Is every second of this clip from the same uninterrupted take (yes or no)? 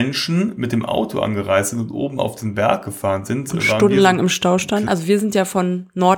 no